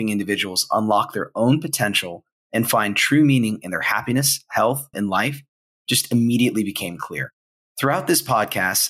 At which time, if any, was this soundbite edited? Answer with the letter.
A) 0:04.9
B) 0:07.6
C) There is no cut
A